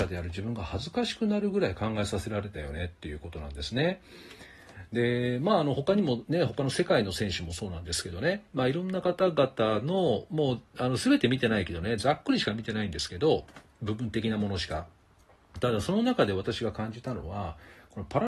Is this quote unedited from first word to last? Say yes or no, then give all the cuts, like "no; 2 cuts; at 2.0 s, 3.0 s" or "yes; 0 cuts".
yes; 0 cuts